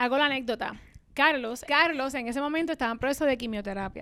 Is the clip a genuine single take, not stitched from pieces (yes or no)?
no